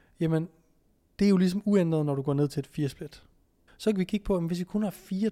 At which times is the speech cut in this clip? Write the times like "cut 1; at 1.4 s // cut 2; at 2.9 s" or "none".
cut 1; at 3.7 s